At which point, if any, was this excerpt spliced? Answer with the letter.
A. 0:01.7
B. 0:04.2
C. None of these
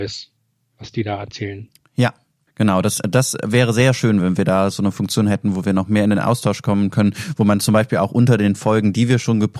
C